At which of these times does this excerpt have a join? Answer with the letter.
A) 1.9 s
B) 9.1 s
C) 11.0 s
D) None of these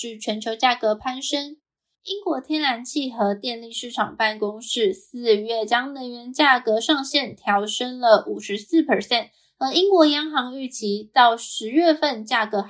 A